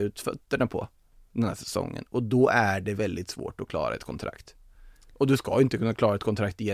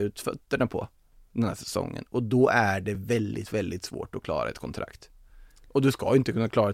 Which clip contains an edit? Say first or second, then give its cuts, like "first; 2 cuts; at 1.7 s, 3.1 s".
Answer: first; 1 cut; at 3.0 s